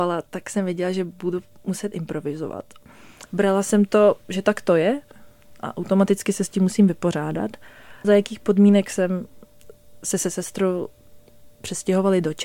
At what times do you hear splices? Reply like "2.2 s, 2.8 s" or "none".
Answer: 3.3 s, 8.0 s